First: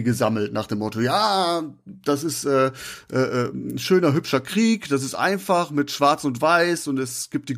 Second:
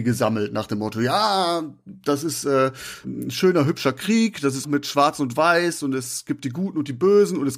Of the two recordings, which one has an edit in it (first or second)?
second